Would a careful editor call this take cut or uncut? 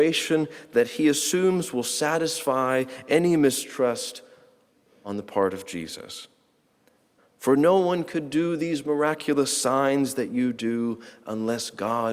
cut